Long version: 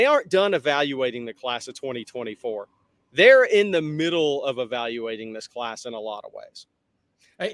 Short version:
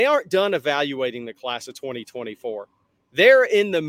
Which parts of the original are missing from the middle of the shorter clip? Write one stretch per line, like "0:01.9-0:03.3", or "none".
none